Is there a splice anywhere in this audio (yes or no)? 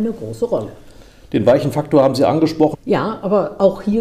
yes